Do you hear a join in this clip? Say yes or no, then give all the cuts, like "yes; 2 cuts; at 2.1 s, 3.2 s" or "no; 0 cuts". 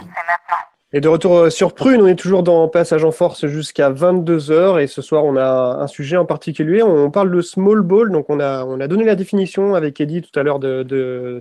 no; 0 cuts